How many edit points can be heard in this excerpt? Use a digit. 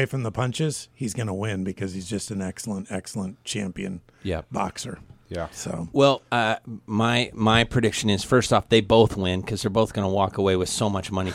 1